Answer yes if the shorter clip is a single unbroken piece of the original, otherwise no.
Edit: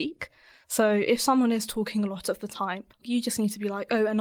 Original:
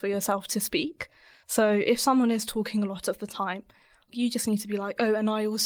no